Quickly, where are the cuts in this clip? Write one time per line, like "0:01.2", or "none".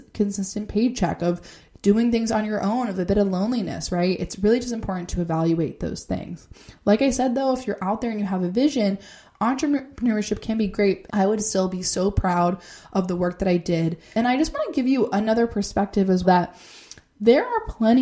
0:11.1
0:14.1
0:16.2